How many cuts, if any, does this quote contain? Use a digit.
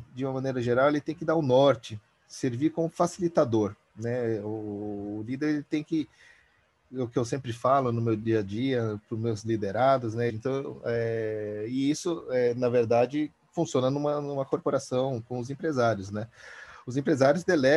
1